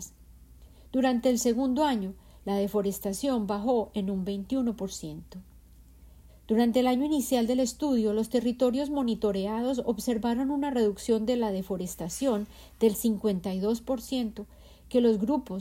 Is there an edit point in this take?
yes; 1 cut; at 6.3 s

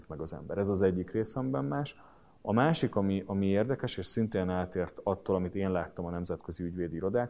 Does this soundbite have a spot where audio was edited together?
no; 0 cuts

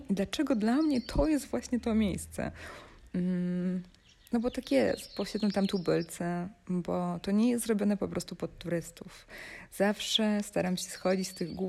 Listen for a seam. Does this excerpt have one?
no; 0 cuts

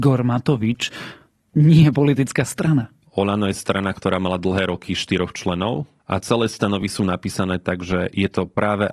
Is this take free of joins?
no; 2 cuts; at 3.1 s, 6.0 s

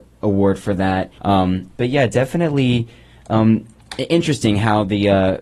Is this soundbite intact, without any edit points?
no; 1 cut; at 1.2 s

